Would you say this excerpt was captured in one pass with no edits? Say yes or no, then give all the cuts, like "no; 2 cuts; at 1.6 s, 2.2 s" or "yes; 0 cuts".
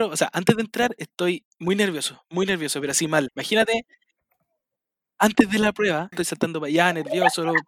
no; 2 cuts; at 3.3 s, 6.1 s